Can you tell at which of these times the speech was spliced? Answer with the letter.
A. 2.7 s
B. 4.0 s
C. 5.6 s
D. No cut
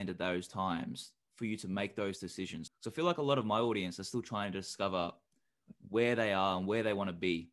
A